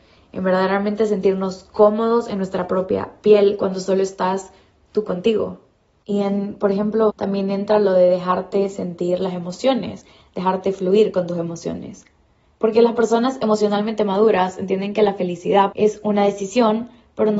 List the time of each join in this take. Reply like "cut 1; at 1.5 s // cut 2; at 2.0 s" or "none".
cut 1; at 7.1 s // cut 2; at 15.7 s